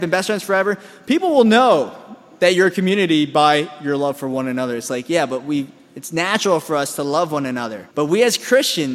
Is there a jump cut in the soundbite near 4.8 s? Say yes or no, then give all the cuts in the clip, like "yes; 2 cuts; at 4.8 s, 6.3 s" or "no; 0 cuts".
no; 1 cut; at 7.9 s